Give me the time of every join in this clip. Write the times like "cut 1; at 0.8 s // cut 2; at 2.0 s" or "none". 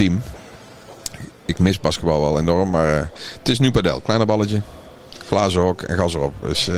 none